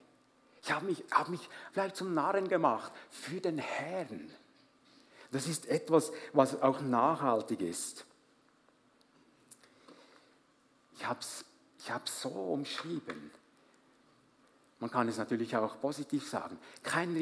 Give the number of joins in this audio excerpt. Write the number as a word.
one